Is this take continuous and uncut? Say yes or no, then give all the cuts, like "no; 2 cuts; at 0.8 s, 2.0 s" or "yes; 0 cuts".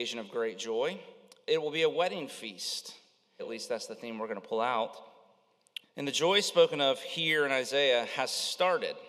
no; 2 cuts; at 3.4 s, 5.8 s